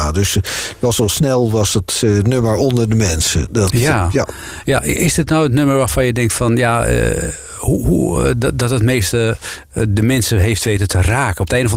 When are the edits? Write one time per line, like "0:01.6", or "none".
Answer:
none